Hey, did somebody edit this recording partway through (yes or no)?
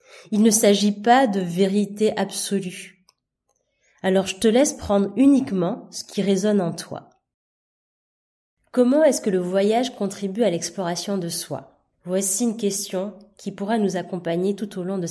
yes